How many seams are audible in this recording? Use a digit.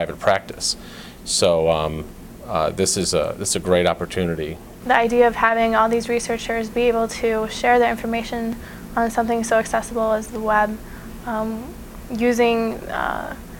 1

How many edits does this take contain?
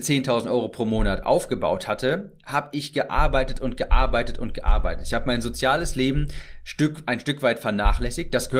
0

